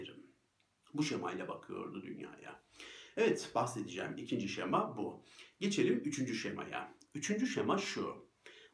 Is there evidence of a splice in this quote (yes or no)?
no